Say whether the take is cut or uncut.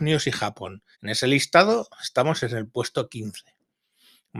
cut